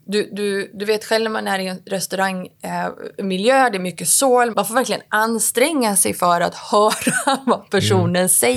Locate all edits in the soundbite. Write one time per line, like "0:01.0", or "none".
0:04.5